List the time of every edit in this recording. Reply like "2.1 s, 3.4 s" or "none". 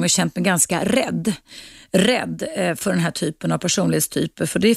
none